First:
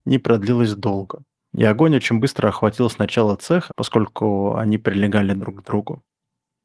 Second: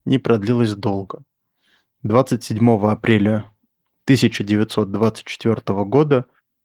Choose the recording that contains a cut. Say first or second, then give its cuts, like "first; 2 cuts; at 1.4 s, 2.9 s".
first; 2 cuts; at 1.5 s, 3.7 s